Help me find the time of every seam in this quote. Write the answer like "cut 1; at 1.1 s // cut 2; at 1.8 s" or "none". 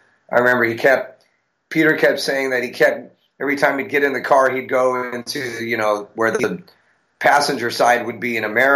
none